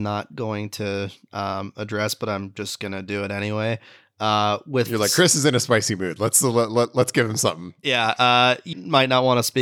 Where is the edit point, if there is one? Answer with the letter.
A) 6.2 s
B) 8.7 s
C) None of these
B